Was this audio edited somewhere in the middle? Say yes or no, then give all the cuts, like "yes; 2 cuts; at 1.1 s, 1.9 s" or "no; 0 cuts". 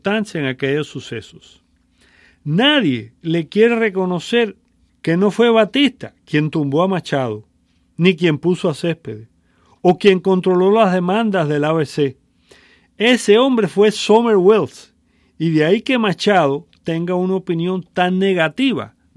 yes; 1 cut; at 4.9 s